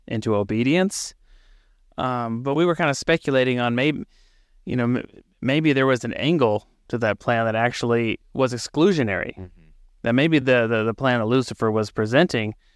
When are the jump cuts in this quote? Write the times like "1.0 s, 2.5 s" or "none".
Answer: none